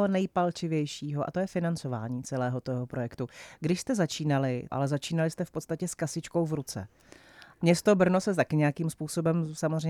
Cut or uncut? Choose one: cut